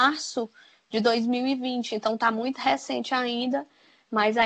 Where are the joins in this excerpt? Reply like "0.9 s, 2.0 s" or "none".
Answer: none